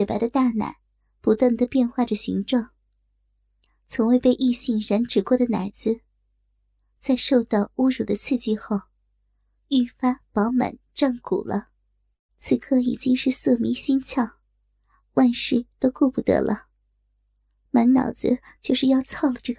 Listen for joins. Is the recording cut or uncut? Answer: cut